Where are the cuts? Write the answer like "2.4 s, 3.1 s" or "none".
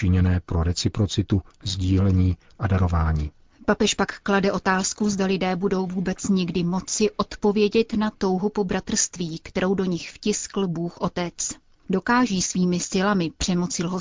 none